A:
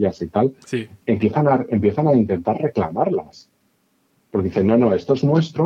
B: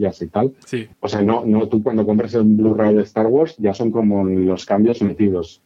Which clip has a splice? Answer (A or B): B